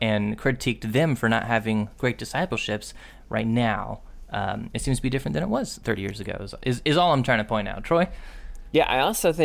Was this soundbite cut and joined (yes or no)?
no